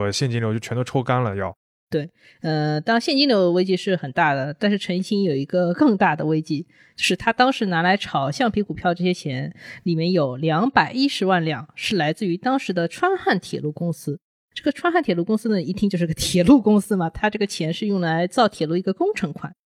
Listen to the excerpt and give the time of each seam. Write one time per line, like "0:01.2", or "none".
none